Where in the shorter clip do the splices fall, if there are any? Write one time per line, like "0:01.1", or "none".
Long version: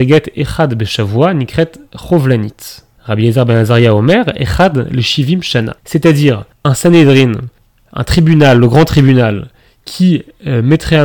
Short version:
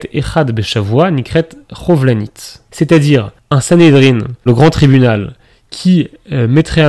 0:02.7
0:04.5